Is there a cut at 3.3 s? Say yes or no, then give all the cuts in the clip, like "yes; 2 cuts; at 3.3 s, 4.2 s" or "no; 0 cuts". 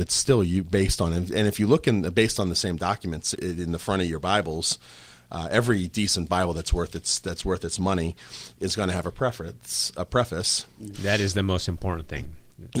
yes; 2 cuts; at 3.3 s, 10.9 s